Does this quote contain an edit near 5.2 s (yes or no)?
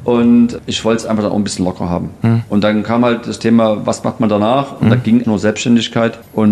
yes